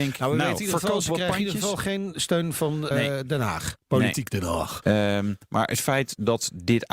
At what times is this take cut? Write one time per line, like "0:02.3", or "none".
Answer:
0:02.9
0:04.8